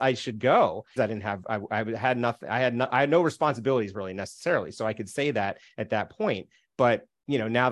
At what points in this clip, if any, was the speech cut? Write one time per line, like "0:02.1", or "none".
0:01.0